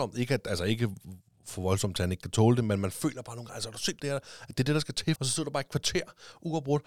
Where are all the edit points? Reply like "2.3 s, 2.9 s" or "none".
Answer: 4.0 s, 5.2 s